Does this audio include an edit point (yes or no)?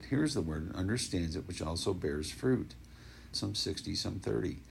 yes